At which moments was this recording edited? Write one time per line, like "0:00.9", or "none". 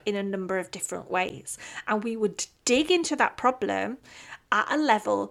none